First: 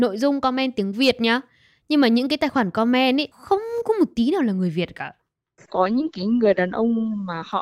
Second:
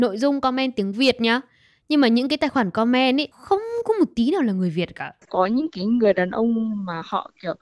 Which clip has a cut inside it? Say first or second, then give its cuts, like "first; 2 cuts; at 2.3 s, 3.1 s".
second; 1 cut; at 5.2 s